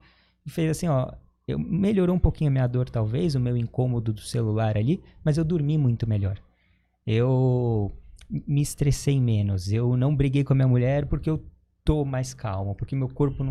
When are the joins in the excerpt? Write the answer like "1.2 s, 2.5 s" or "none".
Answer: none

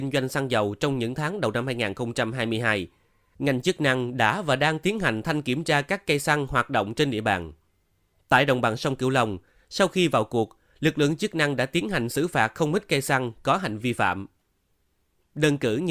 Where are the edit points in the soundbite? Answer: 13.8 s

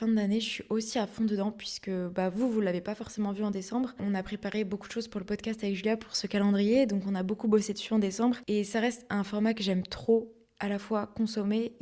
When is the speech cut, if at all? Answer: none

